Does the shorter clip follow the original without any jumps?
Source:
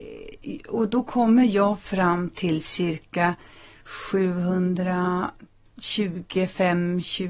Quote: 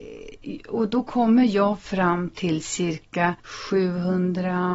no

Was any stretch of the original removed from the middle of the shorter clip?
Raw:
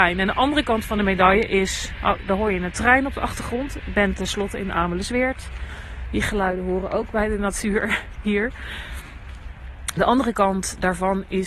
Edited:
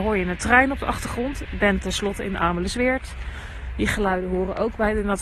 no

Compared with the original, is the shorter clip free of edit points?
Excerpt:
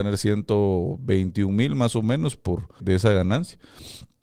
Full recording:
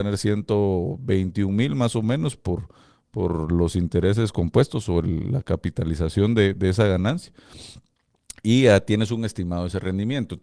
no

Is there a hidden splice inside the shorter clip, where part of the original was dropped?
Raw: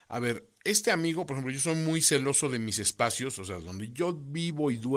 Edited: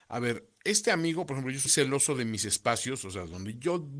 yes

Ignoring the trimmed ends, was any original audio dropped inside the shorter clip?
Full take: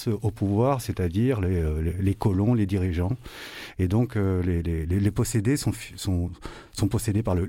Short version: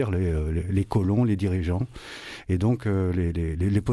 no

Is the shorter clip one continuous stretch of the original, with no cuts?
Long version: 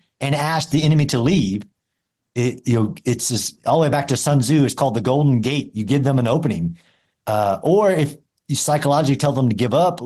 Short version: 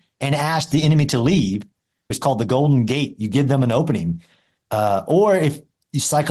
no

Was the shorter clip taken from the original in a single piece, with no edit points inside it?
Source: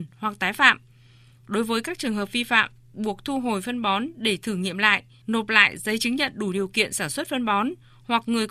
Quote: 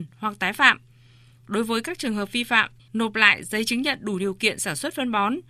no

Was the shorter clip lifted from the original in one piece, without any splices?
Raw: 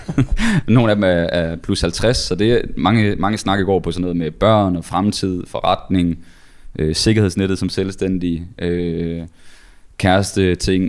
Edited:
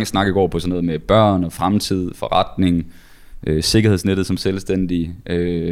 yes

